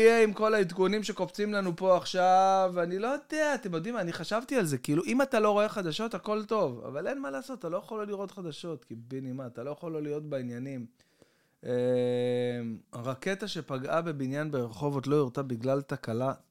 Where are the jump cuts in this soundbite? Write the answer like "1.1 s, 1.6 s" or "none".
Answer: 12.8 s